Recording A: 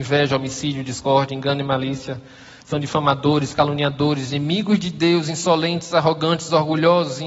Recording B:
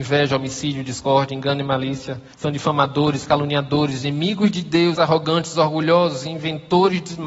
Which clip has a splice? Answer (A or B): B